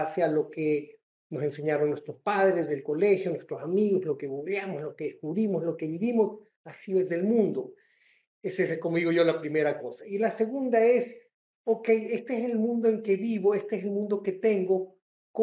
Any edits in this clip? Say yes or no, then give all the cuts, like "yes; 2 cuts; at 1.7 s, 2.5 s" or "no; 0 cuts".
no; 0 cuts